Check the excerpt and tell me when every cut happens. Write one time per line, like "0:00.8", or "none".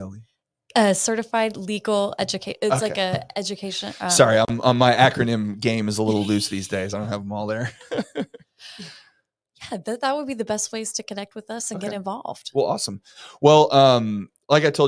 none